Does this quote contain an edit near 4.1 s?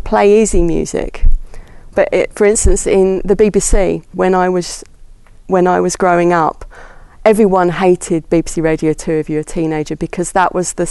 yes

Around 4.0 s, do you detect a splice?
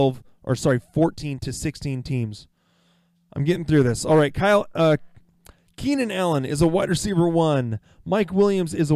no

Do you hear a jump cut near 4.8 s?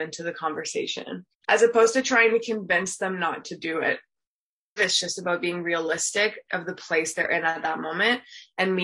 yes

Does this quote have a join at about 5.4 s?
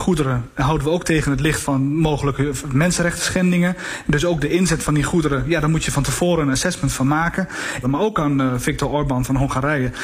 no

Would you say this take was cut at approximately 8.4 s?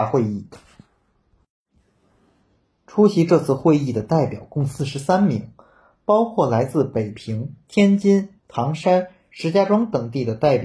yes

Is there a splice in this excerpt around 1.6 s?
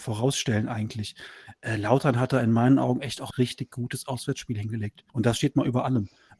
no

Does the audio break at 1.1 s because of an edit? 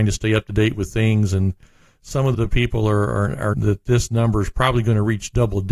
no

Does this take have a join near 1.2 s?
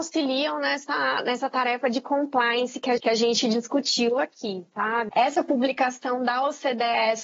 no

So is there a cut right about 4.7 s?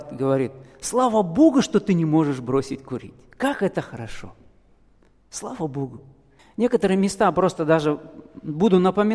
no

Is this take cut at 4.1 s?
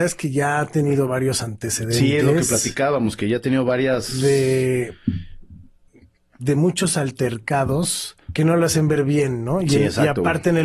no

